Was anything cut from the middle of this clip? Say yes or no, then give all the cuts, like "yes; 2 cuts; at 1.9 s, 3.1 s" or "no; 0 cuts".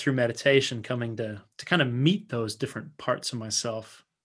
yes; 1 cut; at 1.5 s